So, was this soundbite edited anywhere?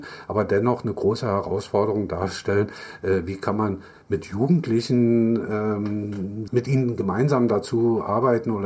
yes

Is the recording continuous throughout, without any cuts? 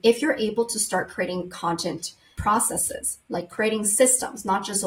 yes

